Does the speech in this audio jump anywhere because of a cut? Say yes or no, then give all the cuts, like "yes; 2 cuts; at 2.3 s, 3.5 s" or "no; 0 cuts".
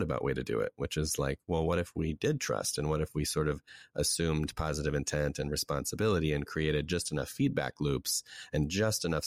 no; 0 cuts